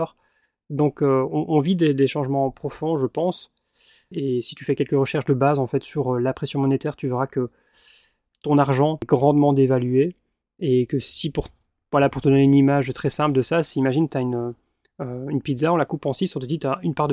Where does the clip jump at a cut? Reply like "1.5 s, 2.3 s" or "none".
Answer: 4.1 s